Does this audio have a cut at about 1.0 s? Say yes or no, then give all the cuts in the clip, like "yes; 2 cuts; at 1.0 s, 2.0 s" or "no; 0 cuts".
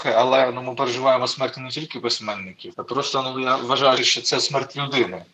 no; 2 cuts; at 2.7 s, 4.0 s